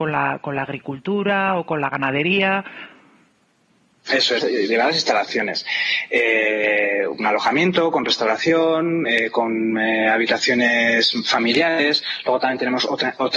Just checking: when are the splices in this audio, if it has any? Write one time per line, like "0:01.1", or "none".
0:04.4

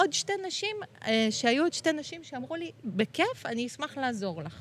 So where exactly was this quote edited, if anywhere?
0:02.8

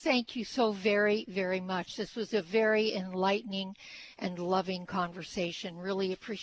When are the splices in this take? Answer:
none

